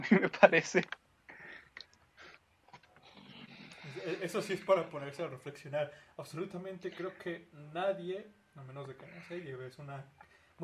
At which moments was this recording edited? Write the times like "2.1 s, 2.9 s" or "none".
none